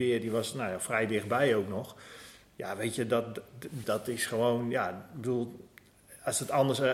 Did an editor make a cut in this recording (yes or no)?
yes